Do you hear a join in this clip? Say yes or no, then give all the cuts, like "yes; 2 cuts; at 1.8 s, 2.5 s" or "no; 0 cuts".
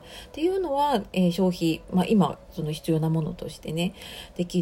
no; 0 cuts